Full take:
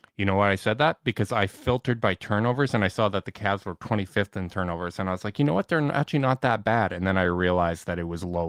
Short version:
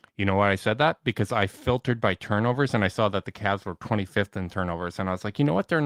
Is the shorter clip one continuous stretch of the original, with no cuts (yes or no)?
yes